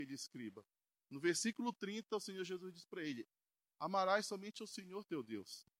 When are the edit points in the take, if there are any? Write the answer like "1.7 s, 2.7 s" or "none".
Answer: none